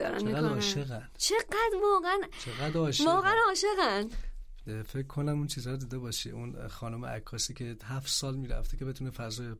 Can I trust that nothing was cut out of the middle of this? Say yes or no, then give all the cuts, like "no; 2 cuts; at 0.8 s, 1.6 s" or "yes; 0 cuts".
yes; 0 cuts